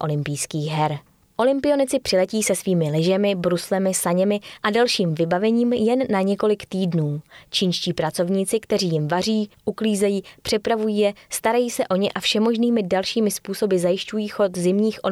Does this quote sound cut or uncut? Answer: uncut